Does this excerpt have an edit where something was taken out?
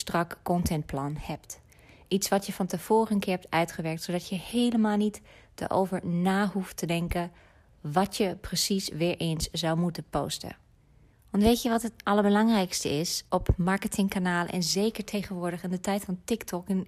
yes; 2 cuts; at 11.1 s, 13.3 s

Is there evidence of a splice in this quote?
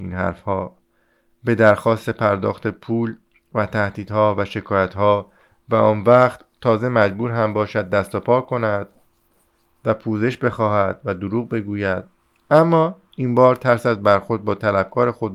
no; 0 cuts

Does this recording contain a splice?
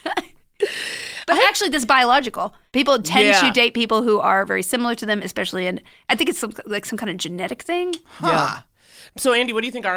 no; 0 cuts

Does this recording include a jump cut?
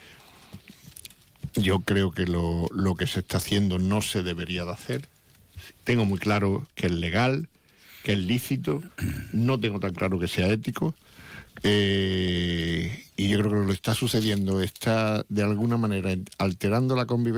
no; 0 cuts

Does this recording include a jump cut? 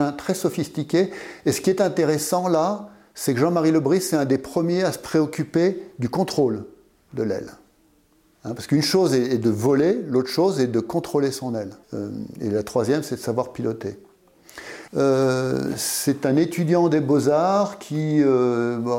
yes; 2 cuts; at 11.8 s, 14.9 s

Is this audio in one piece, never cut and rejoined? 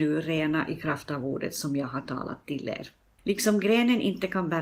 no; 1 cut; at 3.2 s

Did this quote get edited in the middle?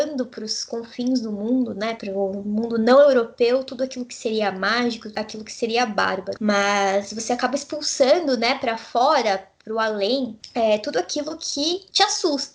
yes; 1 cut; at 6.4 s

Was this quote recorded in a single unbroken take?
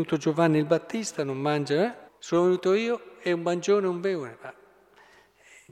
no; 1 cut; at 2.1 s

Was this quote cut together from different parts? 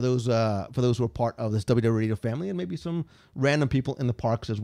no; 0 cuts

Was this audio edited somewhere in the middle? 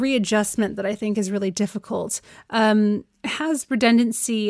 no; 0 cuts

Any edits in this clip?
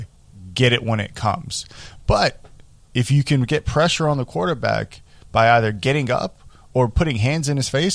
no; 0 cuts

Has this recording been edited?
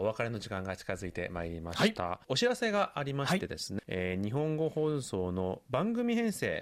yes; 1 cut; at 3.8 s

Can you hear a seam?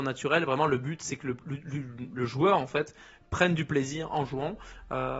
no; 0 cuts

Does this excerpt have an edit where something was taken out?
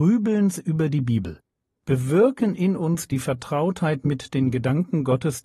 no; 0 cuts

